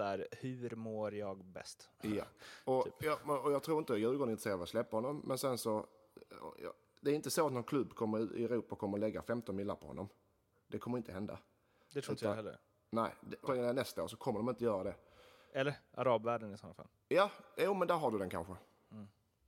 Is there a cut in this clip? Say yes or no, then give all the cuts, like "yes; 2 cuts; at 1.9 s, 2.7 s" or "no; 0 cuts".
yes; 1 cut; at 13.5 s